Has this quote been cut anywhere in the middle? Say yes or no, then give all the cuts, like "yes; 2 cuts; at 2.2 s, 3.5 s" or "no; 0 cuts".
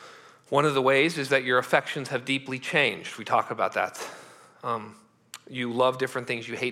no; 0 cuts